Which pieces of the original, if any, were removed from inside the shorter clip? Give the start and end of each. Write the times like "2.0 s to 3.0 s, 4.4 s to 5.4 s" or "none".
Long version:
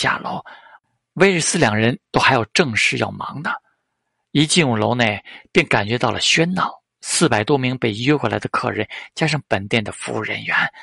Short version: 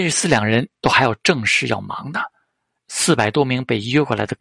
4.1 s to 6.9 s